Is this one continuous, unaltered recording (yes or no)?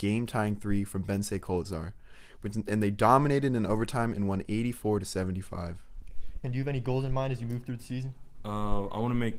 no